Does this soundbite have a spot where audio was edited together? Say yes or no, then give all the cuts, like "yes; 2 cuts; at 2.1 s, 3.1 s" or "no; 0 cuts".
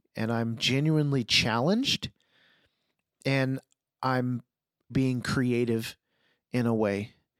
yes; 1 cut; at 4.9 s